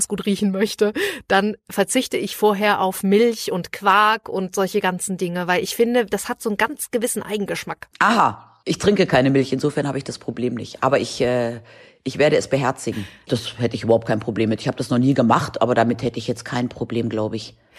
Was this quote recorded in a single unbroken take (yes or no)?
no